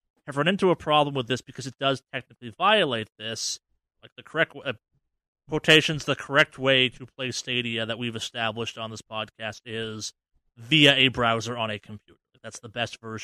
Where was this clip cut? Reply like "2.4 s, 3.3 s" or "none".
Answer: 3.9 s